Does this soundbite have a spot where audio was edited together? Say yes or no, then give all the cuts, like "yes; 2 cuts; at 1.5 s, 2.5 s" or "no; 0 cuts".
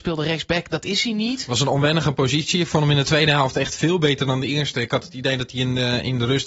no; 0 cuts